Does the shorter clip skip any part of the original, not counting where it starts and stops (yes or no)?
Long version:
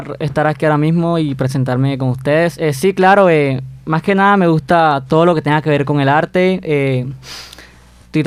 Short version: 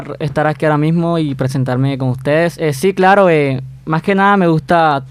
no